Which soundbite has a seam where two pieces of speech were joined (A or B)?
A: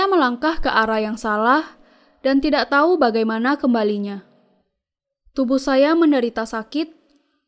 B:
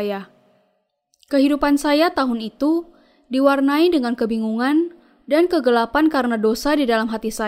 B